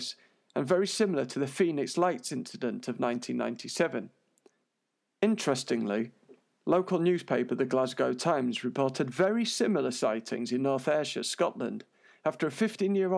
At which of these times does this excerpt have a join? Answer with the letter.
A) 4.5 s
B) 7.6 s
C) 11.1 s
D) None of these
D